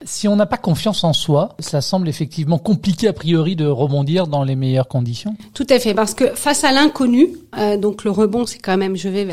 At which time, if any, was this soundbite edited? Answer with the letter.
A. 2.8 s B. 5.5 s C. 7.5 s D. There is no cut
C